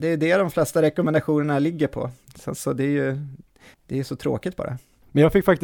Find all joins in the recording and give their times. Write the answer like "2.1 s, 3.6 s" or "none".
none

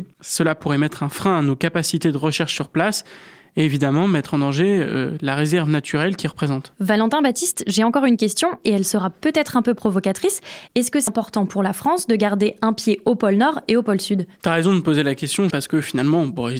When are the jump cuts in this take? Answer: 11.1 s, 15.5 s

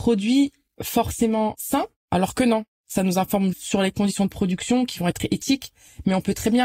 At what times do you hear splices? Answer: 3.5 s

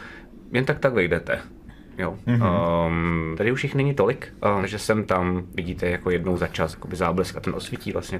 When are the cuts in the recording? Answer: 3.4 s, 4.6 s, 6.7 s

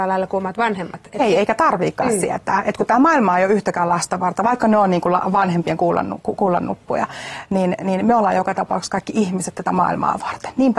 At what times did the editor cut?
none

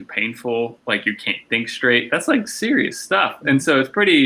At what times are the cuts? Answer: none

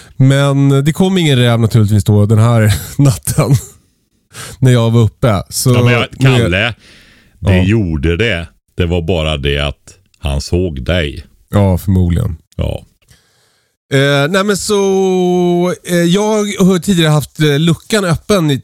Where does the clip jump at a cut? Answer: none

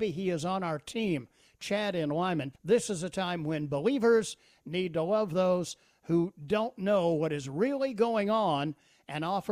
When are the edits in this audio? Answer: 2.5 s

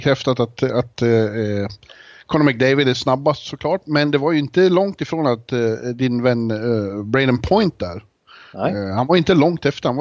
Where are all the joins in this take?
none

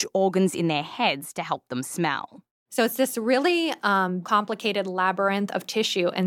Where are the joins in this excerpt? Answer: 4.2 s

